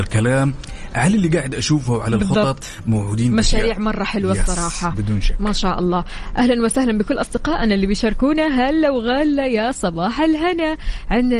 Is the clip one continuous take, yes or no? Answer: yes